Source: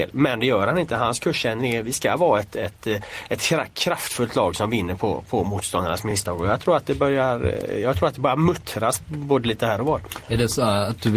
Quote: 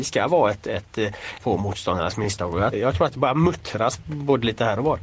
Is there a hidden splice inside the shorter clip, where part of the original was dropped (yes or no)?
yes